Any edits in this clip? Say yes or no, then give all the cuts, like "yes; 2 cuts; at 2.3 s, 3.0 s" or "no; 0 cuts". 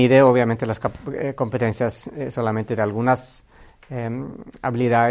no; 0 cuts